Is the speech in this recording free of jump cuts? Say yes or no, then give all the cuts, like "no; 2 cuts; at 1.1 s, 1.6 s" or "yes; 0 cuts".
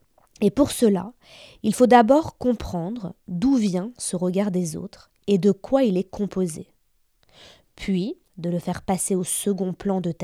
no; 1 cut; at 8.3 s